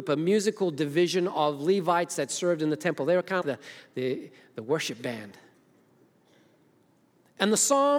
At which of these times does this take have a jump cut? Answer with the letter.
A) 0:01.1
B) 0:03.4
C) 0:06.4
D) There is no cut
B